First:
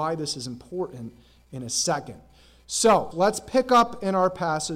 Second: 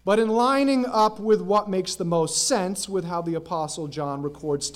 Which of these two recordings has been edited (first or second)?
first